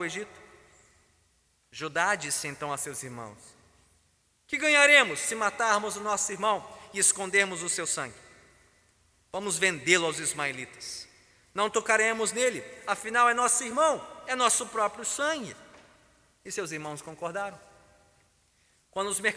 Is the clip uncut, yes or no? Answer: yes